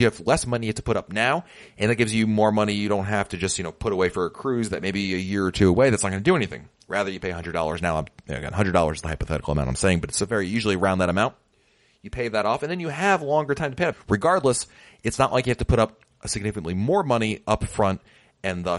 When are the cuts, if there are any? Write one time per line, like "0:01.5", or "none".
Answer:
0:13.9